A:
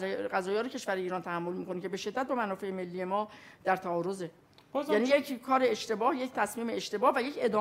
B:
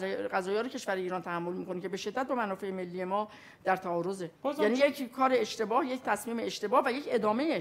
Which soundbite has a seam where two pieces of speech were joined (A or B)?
B